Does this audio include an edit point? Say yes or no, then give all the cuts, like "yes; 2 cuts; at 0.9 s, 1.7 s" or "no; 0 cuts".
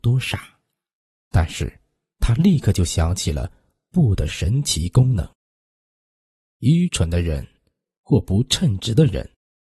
yes; 1 cut; at 1.1 s